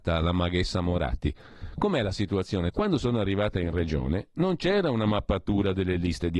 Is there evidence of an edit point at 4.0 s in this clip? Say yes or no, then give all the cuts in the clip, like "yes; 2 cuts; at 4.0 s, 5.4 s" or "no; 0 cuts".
no; 1 cut; at 2.7 s